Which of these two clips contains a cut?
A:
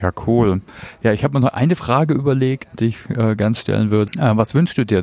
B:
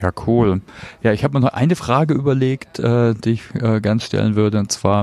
A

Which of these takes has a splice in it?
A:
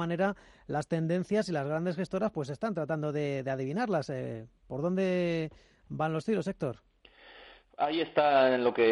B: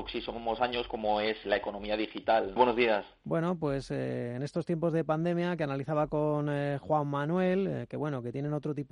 B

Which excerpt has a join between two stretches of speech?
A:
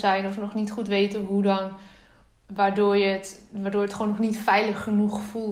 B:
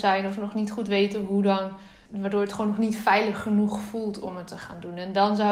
B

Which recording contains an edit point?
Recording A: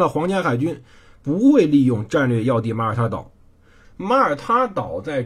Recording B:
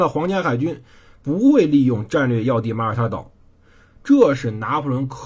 A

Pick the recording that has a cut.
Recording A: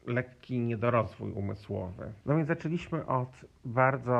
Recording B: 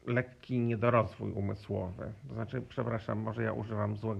A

